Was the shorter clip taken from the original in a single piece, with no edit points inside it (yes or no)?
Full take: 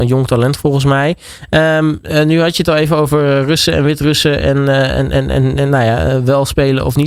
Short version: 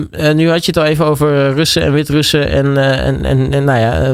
no